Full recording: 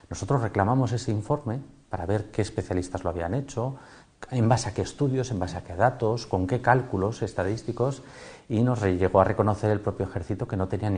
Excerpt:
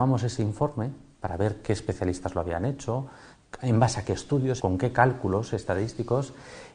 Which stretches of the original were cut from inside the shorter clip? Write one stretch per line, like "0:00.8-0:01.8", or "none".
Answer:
0:05.3-0:06.3